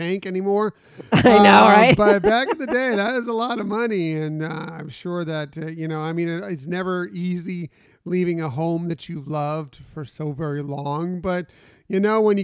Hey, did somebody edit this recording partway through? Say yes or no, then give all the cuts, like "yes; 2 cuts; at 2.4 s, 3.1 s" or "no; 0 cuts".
no; 0 cuts